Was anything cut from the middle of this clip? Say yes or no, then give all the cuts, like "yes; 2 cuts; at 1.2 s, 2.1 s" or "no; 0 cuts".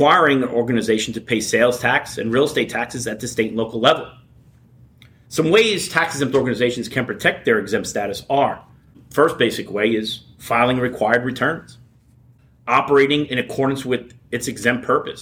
no; 0 cuts